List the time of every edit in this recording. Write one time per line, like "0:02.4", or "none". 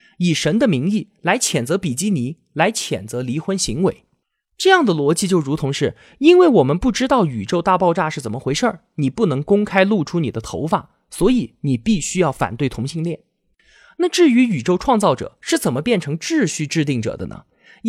0:08.9